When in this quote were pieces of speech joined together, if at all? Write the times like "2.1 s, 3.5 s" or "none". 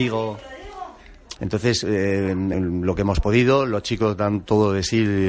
1.4 s, 2.5 s